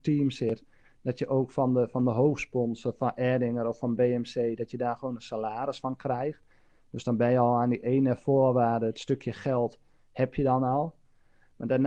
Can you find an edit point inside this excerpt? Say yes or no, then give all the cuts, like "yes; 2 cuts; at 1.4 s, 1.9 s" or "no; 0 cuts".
no; 0 cuts